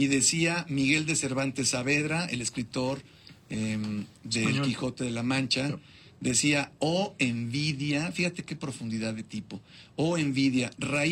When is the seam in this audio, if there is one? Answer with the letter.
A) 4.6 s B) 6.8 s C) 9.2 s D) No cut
D